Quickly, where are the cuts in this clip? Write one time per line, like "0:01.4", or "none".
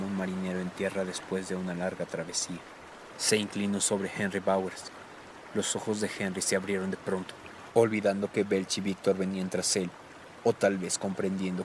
0:07.7